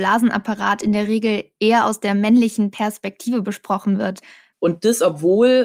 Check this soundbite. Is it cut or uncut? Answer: cut